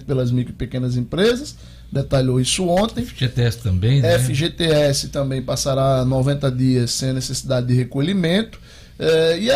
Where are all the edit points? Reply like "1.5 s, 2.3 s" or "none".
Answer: none